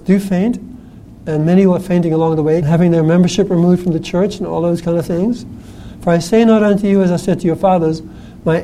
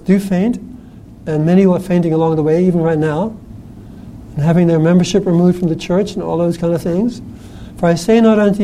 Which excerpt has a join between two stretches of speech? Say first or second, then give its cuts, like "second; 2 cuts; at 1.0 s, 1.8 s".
first; 1 cut; at 2.6 s